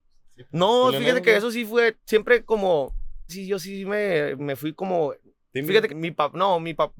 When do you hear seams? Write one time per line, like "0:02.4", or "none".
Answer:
0:03.3
0:04.4
0:05.9